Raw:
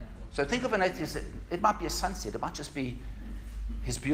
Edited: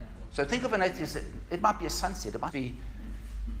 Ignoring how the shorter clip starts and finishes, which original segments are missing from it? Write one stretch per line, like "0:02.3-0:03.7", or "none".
0:02.5-0:02.7